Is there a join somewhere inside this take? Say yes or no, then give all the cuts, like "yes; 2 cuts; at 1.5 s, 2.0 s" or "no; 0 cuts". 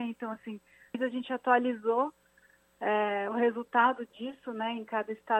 yes; 1 cut; at 0.9 s